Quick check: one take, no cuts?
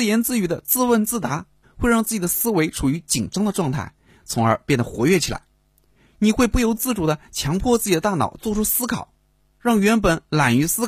no; 1 cut; at 1.6 s

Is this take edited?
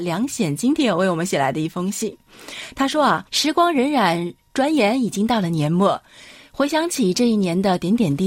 yes; 2 cuts; at 3.3 s, 4.5 s

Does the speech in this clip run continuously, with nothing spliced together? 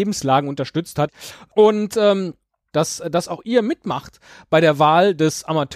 no; 1 cut; at 2.7 s

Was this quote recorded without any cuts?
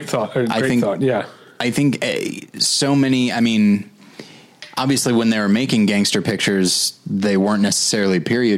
yes; 0 cuts

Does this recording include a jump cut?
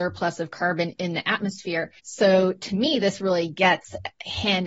yes; 1 cut; at 2.0 s

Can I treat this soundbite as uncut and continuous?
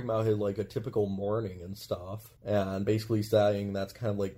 no; 1 cut; at 2.4 s

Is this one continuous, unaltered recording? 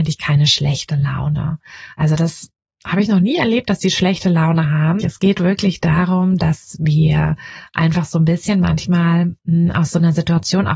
no; 1 cut; at 5.0 s

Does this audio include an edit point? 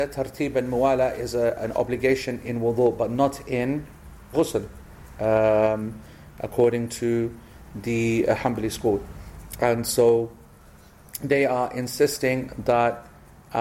yes; 1 cut; at 4.3 s

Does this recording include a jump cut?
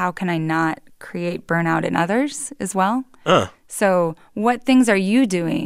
no; 0 cuts

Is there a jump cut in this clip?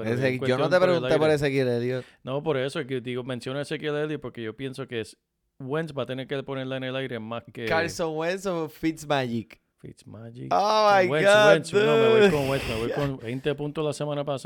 yes; 2 cuts; at 9.7 s, 13.2 s

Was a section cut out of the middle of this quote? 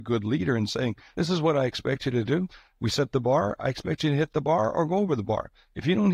no; 0 cuts

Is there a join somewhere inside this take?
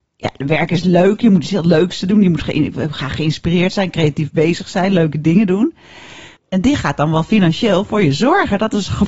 yes; 1 cut; at 6.4 s

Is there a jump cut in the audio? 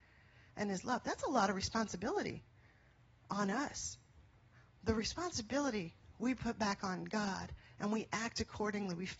no; 0 cuts

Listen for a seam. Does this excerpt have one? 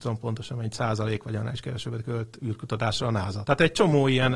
yes; 1 cut; at 3.4 s

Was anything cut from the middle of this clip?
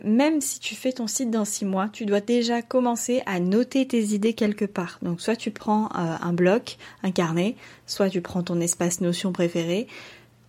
no; 0 cuts

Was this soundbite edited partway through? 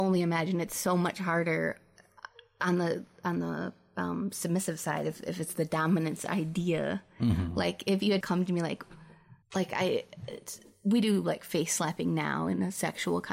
yes; 2 cuts; at 8.2 s, 9.4 s

